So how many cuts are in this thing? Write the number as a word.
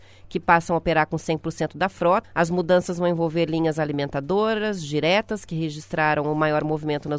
one